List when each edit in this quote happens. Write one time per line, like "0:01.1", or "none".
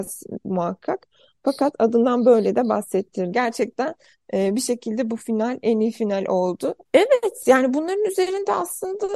0:03.3
0:06.9